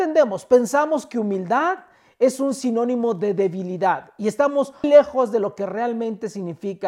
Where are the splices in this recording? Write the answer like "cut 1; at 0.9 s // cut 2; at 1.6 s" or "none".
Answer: cut 1; at 4.8 s